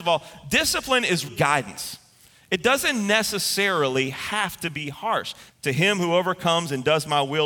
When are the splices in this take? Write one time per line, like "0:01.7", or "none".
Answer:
0:01.3
0:05.5